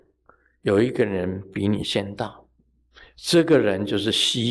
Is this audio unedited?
yes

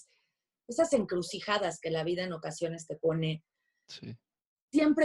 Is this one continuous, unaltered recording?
yes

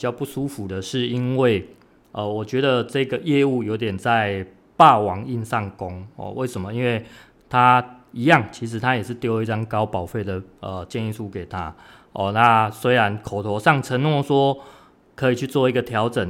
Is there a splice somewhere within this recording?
no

